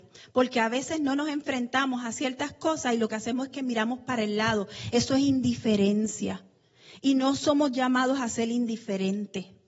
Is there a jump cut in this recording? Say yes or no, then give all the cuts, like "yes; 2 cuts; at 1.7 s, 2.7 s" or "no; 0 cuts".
no; 0 cuts